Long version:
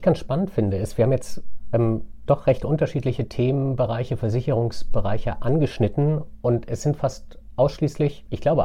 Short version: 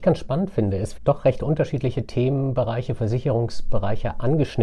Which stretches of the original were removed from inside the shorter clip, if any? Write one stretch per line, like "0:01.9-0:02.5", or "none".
0:01.0-0:02.2